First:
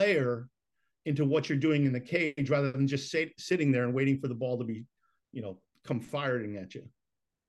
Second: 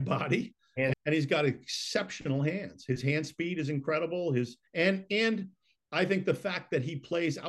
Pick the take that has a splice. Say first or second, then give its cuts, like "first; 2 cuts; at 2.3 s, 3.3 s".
second; 2 cuts; at 0.9 s, 4.7 s